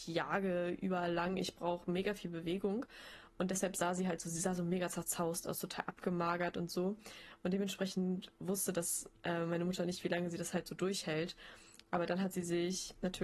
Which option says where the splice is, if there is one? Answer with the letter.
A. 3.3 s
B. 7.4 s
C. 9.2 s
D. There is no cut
D